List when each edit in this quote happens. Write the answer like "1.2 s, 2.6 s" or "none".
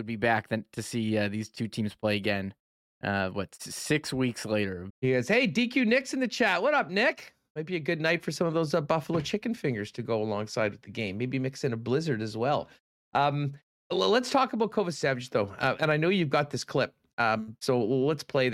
4.9 s